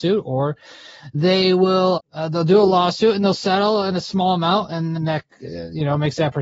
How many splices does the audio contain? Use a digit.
2